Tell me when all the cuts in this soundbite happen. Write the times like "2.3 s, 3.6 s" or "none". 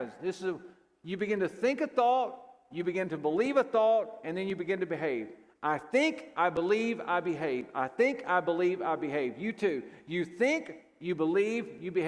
none

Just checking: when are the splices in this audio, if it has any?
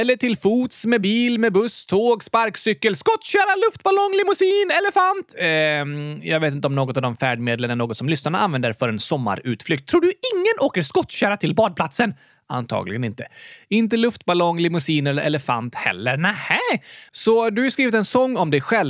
17.1 s

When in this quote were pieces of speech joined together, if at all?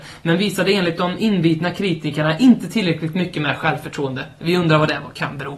none

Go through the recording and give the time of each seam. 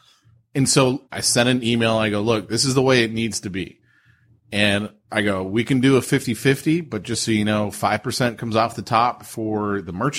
1.0 s

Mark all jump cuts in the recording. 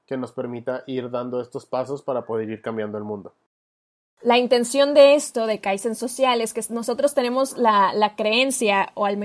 none

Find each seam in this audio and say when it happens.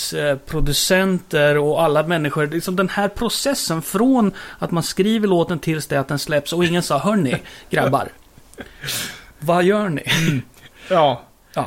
9.3 s

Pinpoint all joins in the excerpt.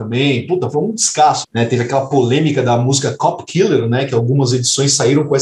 1.4 s

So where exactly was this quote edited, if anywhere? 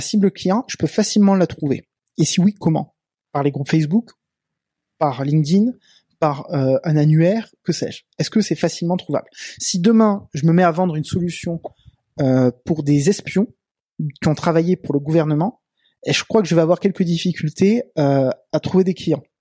none

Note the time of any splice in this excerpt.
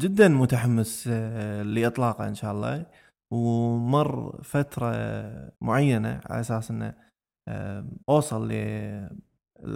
5.5 s, 8.0 s

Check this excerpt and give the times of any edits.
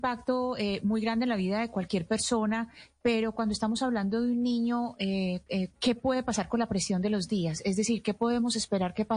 5.7 s

